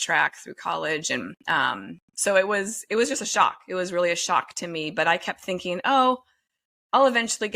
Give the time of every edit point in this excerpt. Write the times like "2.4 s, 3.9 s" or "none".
none